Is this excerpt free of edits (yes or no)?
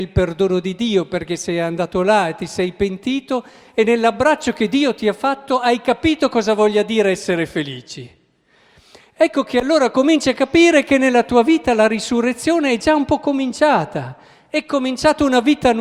yes